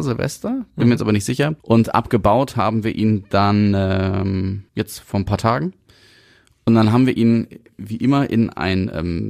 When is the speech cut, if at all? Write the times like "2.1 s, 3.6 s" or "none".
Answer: 1.6 s, 4.7 s